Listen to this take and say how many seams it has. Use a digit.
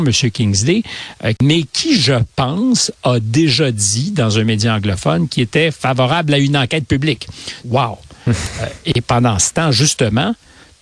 2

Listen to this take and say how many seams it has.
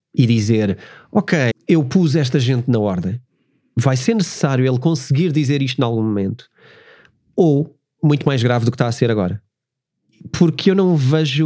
2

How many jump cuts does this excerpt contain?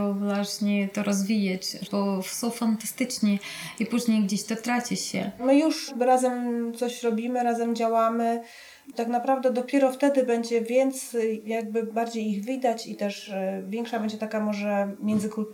2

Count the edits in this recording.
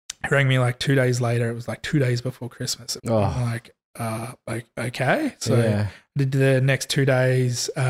1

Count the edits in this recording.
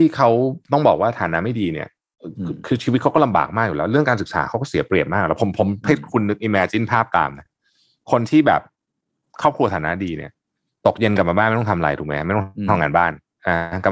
0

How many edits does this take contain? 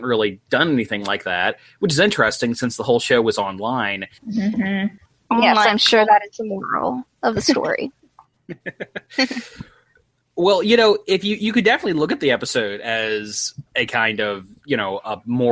2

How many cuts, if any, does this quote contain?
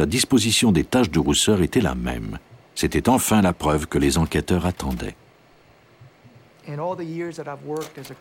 0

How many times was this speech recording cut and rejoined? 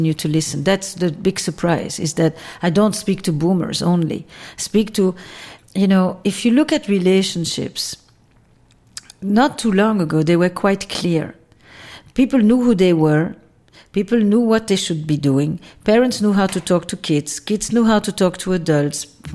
1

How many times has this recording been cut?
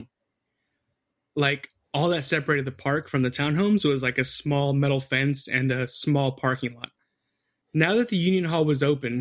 1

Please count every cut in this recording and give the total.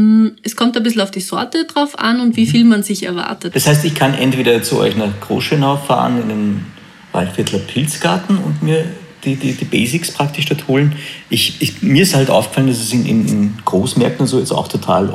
1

